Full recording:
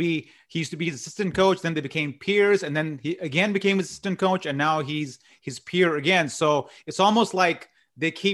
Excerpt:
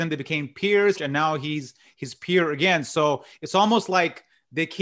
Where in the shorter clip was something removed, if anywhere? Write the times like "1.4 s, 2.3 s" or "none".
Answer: 0.9 s